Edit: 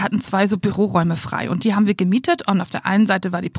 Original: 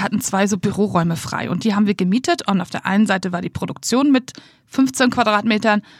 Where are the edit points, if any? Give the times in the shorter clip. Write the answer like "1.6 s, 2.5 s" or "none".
none